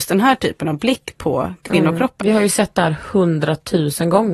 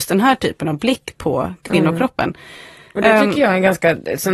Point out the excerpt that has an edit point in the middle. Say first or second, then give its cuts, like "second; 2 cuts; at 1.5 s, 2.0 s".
first; 1 cut; at 2.2 s